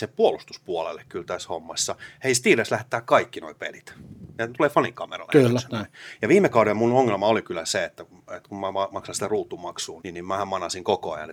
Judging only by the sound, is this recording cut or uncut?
cut